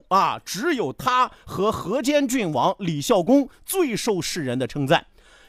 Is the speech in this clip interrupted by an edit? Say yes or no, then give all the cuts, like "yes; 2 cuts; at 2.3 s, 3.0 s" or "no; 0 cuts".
no; 0 cuts